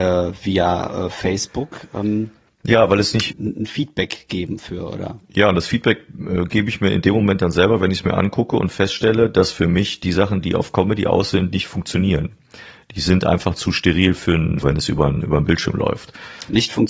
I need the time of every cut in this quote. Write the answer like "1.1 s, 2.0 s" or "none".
3.3 s, 14.6 s